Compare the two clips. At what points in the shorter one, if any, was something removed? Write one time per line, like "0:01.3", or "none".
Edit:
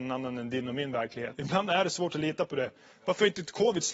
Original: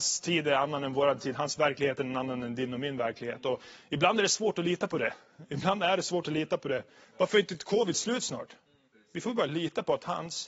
0:01.3